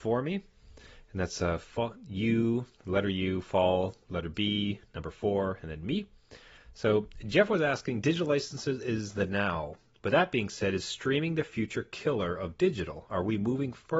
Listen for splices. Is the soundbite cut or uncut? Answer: uncut